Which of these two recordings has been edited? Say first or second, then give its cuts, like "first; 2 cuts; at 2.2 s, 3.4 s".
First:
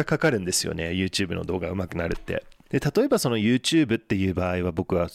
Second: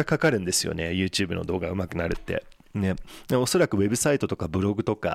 first; 1 cut; at 2.7 s